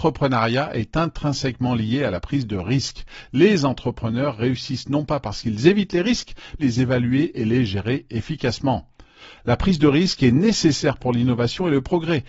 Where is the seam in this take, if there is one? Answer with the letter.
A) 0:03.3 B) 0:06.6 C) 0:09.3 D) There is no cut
B